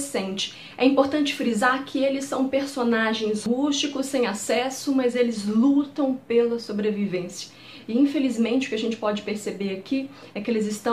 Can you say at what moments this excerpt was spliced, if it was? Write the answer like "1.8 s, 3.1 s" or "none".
none